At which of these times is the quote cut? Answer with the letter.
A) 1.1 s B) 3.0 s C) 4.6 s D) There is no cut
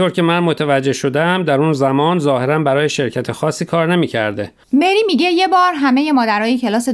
C